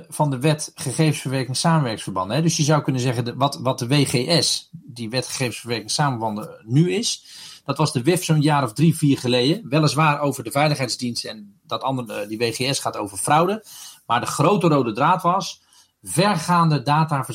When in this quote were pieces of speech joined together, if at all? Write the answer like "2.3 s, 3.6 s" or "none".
none